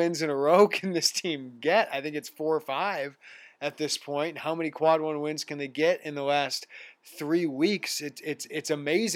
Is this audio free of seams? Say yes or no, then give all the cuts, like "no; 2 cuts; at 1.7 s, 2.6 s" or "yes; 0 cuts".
yes; 0 cuts